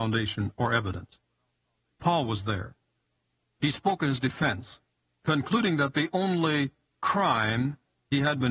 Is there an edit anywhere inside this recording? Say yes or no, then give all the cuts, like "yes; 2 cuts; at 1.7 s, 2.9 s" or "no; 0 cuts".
no; 0 cuts